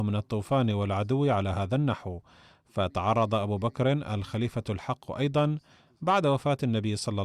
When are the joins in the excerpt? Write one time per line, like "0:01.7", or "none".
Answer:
none